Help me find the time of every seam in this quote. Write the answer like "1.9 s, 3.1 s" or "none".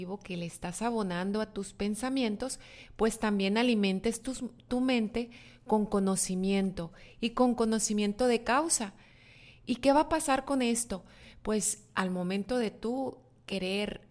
none